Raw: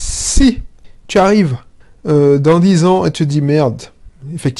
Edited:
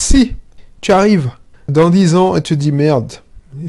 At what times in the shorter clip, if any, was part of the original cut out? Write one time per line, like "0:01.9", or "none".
0:01.7